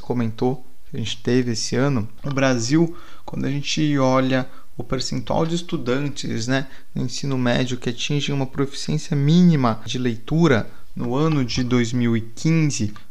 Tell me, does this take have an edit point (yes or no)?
no